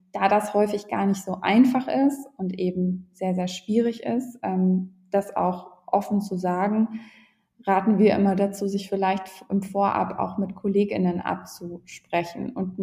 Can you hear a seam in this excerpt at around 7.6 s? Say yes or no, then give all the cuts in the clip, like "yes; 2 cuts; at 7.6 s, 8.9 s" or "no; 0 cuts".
no; 0 cuts